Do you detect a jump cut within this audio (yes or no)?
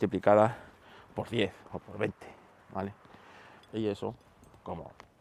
yes